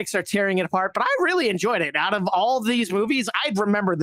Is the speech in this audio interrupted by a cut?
no; 0 cuts

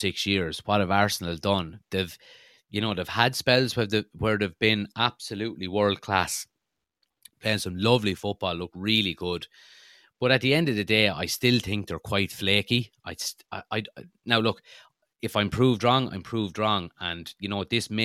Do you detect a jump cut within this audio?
no; 0 cuts

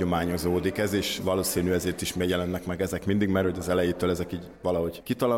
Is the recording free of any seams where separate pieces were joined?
no; 1 cut; at 1.2 s

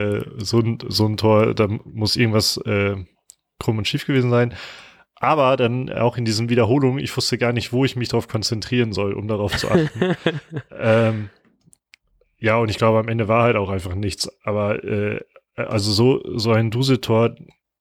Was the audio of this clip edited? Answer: no; 0 cuts

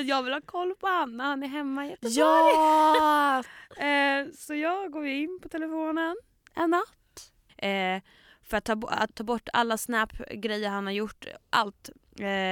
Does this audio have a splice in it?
yes; 3 cuts; at 3.4 s, 7.5 s, 9.1 s

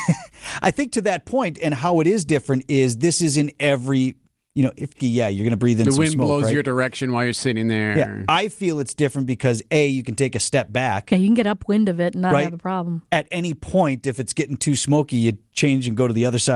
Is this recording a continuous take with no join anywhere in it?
no; 1 cut; at 5.0 s

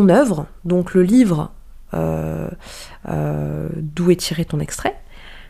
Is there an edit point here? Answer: no; 0 cuts

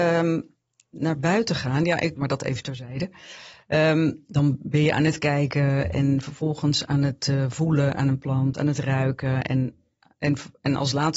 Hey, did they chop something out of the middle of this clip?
yes; 1 cut; at 2.2 s

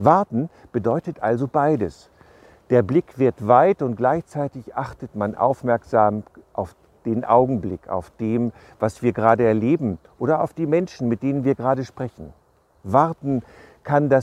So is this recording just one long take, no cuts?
yes; 0 cuts

